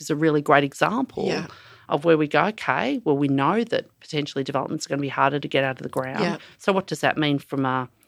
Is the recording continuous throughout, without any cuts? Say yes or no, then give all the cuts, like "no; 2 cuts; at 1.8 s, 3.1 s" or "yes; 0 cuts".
yes; 0 cuts